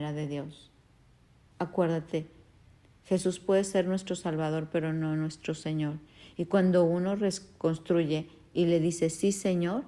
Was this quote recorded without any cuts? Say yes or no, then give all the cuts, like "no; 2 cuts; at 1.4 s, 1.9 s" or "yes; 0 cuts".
yes; 0 cuts